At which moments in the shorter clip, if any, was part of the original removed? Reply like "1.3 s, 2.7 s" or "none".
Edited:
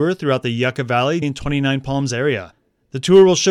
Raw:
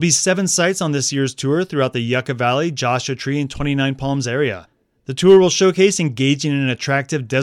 1.2 s